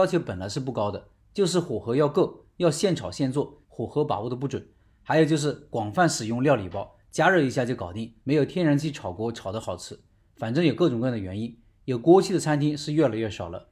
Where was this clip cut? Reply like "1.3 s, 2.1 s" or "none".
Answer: 3.6 s, 8.2 s

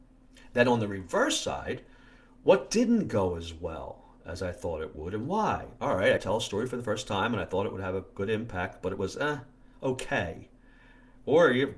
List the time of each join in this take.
none

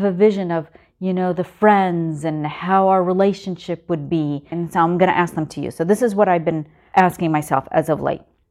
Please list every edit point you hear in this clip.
4.5 s

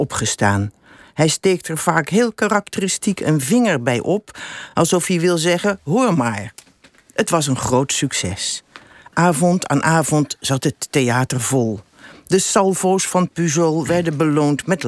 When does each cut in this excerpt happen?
none

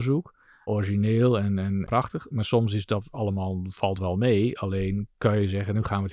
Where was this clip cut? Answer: none

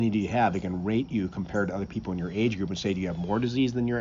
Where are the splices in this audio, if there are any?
none

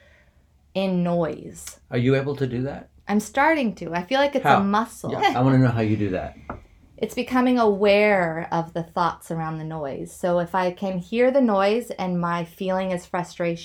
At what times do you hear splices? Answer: 5.2 s

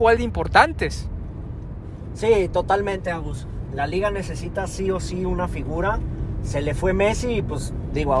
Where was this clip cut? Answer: none

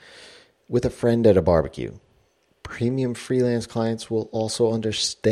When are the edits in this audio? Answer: none

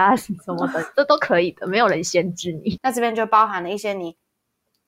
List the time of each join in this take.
2.8 s

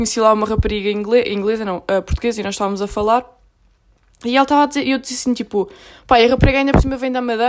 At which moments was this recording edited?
none

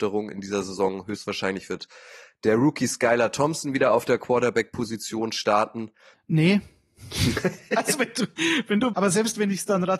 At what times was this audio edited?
6.1 s, 8.9 s

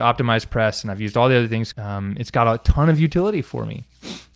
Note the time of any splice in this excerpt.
1.7 s

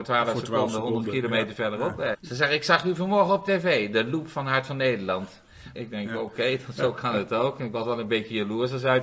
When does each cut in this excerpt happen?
2.1 s, 5.7 s

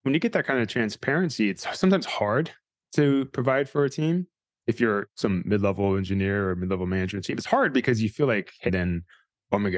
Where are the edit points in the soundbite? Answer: 8.7 s

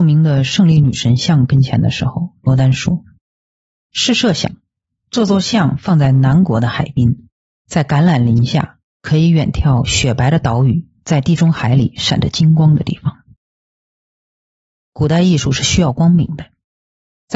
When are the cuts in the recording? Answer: none

